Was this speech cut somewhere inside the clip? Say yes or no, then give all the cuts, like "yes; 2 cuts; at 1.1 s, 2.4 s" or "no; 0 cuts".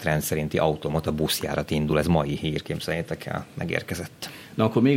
no; 0 cuts